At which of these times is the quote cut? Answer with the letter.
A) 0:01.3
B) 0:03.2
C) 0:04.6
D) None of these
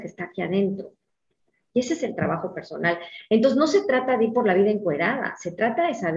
D